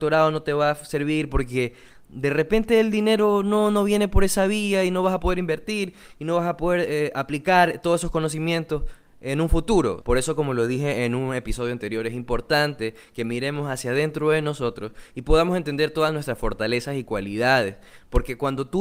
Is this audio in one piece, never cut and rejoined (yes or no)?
no